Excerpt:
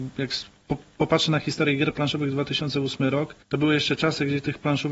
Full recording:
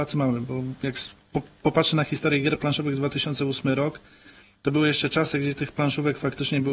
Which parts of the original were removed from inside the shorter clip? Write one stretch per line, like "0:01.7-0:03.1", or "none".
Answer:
0:04.1-0:04.6